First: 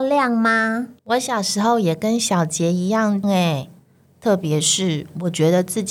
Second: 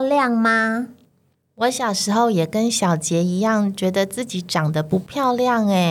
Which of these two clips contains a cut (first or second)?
first